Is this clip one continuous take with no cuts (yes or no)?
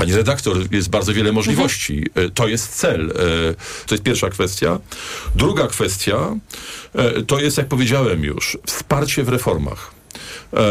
no